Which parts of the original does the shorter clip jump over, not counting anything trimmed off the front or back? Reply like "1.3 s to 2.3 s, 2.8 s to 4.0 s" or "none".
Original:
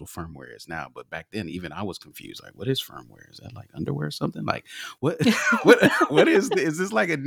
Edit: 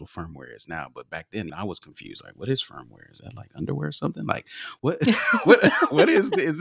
1.5 s to 1.7 s